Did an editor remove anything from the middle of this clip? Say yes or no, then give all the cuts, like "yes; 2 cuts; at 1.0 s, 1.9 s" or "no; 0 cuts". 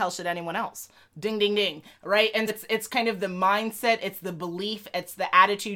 yes; 1 cut; at 2.5 s